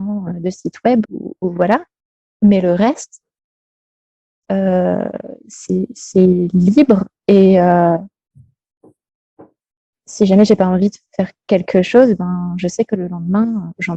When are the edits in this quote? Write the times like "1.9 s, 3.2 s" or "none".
1.0 s